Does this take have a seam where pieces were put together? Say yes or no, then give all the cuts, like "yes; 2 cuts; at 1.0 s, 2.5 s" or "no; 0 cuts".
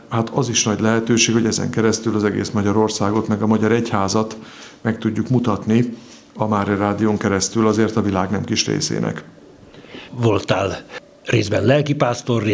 yes; 1 cut; at 10.1 s